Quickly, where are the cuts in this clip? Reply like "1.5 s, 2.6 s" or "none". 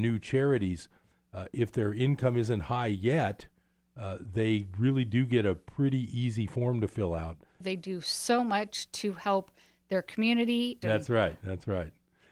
7.6 s, 10.8 s

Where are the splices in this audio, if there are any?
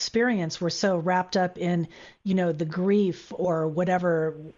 none

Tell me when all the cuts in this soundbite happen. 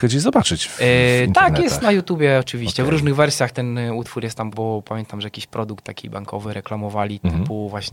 4.5 s

